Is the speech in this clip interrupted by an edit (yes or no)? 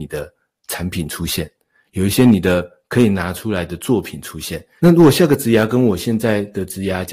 yes